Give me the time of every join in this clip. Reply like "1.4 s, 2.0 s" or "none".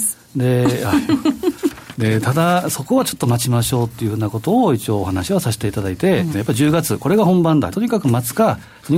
6.3 s, 7.7 s